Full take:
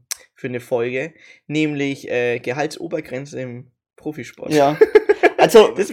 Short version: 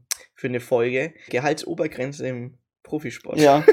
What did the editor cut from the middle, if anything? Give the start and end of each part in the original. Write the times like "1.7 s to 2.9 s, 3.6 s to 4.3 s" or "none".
1.3 s to 2.4 s